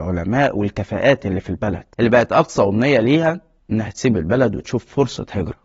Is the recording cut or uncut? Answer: cut